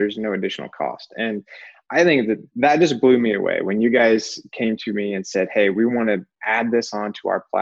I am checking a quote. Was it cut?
no; 0 cuts

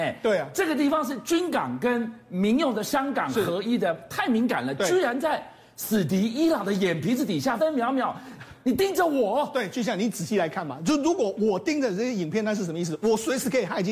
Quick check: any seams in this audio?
yes; 1 cut; at 7.6 s

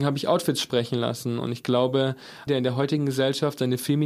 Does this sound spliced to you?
yes; 1 cut; at 2.5 s

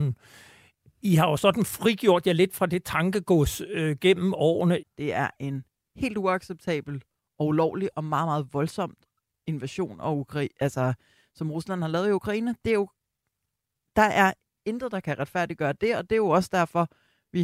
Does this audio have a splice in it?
yes; 1 cut; at 4.8 s

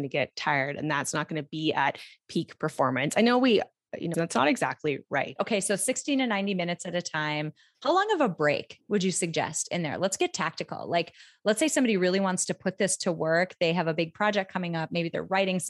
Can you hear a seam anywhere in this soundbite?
yes; 2 cuts; at 4.1 s, 5.4 s

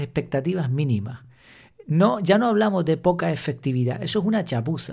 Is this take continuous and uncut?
yes; 0 cuts

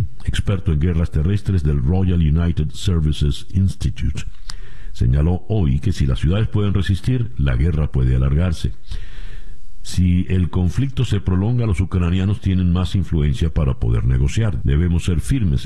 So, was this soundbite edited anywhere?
yes; 1 cut; at 14.6 s

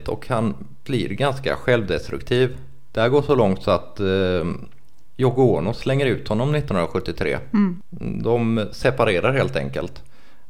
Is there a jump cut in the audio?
no; 0 cuts

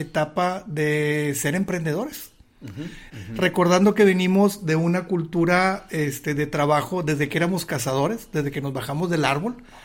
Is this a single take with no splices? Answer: no; 1 cut; at 3.1 s

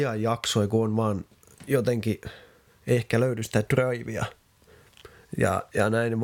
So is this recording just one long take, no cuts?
yes; 0 cuts

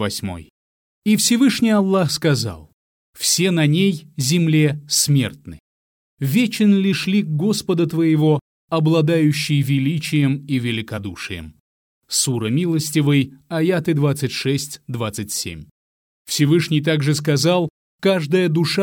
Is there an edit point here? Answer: no; 0 cuts

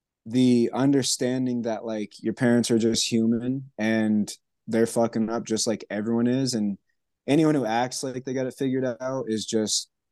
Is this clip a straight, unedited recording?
yes; 0 cuts

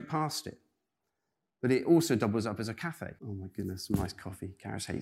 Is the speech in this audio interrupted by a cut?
yes; 1 cut; at 3.2 s

